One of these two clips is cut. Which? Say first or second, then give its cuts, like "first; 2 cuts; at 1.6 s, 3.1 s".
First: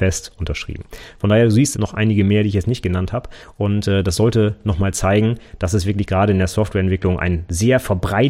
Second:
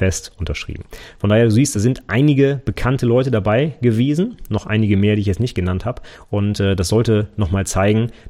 first; 1 cut; at 1.7 s